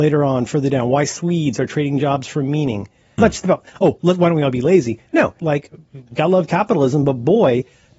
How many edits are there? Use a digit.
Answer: 2